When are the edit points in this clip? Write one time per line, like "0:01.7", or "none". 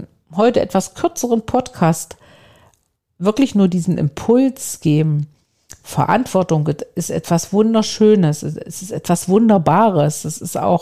none

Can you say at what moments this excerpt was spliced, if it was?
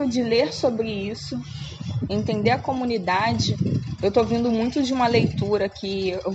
0:02.1

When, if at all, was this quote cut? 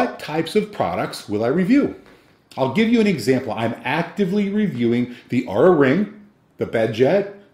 none

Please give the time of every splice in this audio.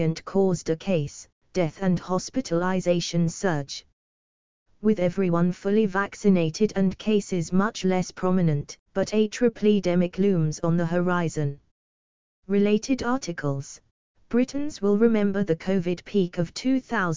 0:08.9
0:14.1

